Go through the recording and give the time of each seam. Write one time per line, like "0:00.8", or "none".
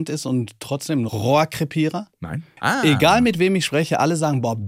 0:02.6